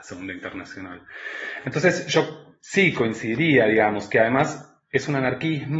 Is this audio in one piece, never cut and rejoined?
yes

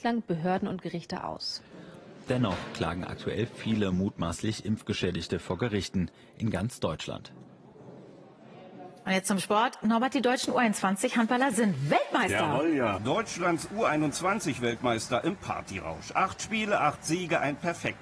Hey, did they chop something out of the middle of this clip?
yes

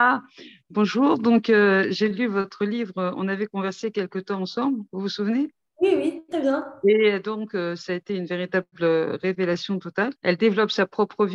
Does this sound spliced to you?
yes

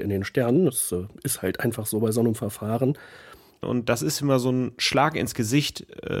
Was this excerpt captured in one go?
no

